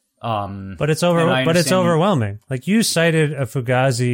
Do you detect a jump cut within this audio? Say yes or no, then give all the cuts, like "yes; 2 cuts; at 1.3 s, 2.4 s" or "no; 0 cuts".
no; 0 cuts